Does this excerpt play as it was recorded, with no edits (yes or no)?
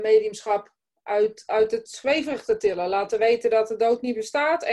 yes